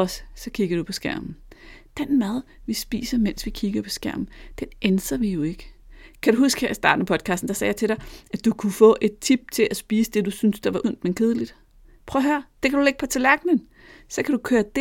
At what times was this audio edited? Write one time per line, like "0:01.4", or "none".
none